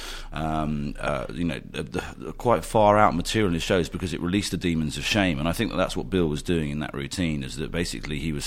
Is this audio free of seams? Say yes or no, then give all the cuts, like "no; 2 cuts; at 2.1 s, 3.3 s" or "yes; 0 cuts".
yes; 0 cuts